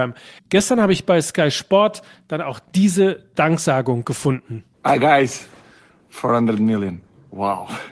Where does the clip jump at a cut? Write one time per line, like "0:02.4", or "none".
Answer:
0:04.7